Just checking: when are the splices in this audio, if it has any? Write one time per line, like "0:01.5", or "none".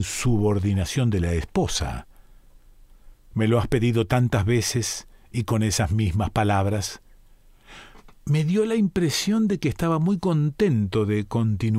0:03.3